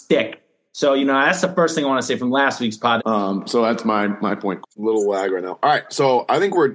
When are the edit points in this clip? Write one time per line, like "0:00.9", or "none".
0:03.0
0:04.6